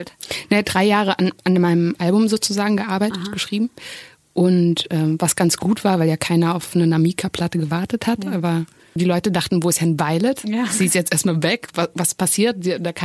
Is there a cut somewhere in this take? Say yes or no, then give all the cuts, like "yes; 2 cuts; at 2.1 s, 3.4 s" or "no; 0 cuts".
yes; 1 cut; at 9.0 s